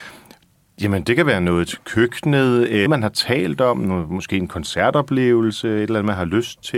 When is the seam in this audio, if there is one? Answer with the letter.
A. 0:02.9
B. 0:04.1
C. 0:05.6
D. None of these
A